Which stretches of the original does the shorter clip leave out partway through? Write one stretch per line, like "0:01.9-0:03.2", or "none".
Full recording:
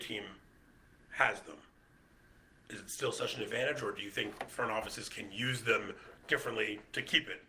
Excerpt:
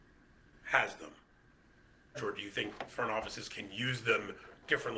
0:02.6-0:03.7